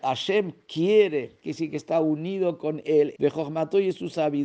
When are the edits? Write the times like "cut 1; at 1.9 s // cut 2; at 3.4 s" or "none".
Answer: cut 1; at 1.4 s // cut 2; at 3.1 s